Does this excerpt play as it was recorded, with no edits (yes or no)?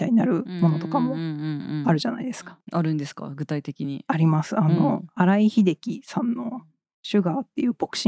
yes